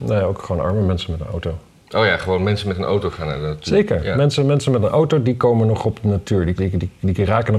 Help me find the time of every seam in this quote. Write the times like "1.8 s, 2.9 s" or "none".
6.6 s